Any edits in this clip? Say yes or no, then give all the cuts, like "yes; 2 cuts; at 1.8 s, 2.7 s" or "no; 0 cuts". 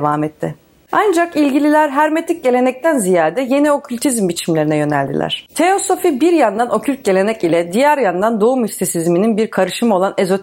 no; 0 cuts